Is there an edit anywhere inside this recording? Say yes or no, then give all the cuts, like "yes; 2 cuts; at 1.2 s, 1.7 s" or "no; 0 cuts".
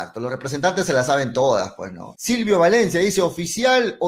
yes; 1 cut; at 2.1 s